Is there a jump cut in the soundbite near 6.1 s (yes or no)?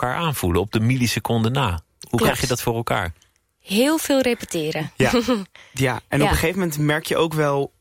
no